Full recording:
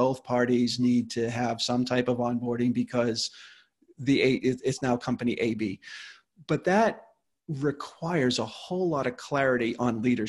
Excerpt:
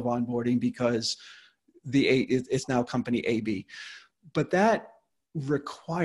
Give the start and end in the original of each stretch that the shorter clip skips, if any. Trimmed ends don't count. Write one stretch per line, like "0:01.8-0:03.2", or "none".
none